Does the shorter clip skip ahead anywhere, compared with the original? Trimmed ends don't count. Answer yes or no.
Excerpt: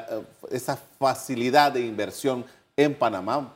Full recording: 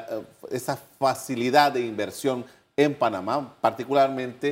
no